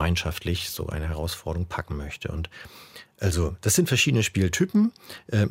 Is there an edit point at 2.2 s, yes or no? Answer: no